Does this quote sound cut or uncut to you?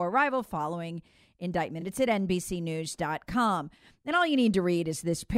uncut